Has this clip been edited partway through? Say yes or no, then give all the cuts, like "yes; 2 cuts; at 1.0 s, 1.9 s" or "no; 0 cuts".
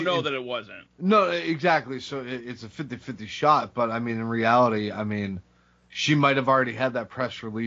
no; 0 cuts